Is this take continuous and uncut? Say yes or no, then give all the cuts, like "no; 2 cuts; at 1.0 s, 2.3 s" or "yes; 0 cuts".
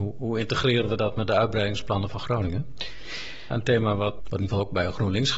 no; 1 cut; at 3.5 s